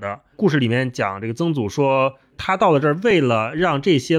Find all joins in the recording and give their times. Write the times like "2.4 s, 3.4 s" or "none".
none